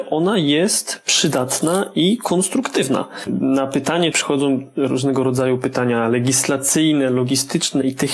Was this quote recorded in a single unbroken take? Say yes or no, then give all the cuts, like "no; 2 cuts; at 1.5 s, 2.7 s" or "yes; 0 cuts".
no; 1 cut; at 4.1 s